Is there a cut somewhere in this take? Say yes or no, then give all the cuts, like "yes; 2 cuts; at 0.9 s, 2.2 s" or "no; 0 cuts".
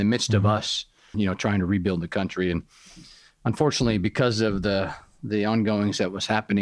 yes; 1 cut; at 1.1 s